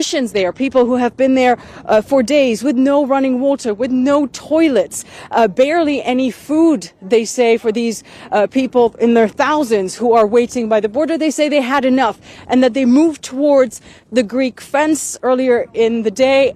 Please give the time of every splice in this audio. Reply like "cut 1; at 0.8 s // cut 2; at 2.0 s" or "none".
none